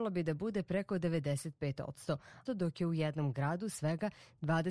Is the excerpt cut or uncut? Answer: cut